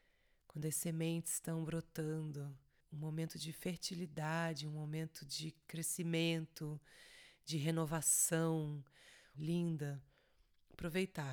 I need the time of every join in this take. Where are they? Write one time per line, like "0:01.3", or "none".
0:09.3